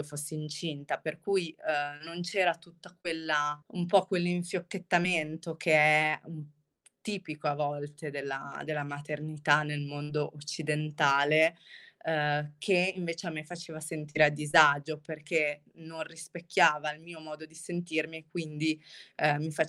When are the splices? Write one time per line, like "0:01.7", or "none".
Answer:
0:03.6